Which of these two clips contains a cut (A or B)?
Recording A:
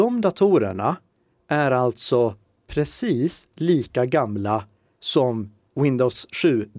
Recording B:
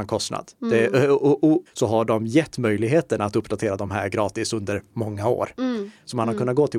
B